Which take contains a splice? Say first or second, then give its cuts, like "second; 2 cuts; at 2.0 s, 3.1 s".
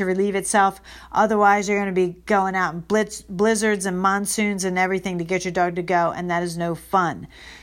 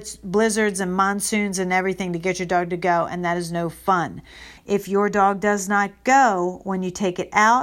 second; 1 cut; at 4.6 s